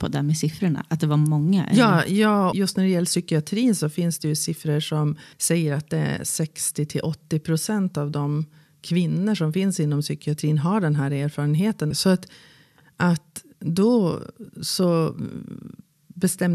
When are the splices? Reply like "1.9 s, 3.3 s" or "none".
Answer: 2.5 s, 5.3 s, 11.9 s